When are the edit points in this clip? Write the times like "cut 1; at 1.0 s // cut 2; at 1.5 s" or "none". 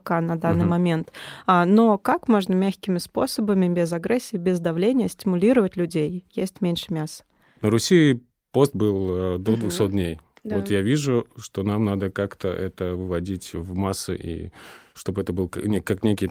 none